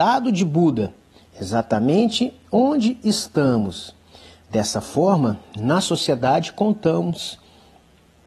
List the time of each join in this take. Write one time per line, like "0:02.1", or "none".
0:01.2